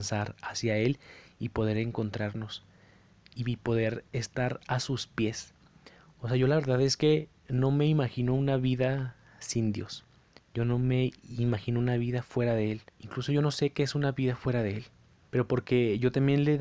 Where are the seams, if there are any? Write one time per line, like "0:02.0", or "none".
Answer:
0:12.9
0:15.3